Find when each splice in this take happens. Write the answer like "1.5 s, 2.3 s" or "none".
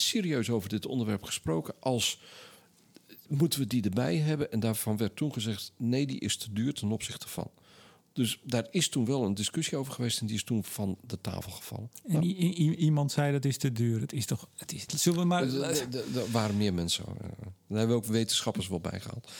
14.9 s